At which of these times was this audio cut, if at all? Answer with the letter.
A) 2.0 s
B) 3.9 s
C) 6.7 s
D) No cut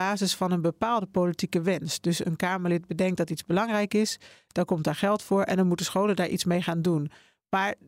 D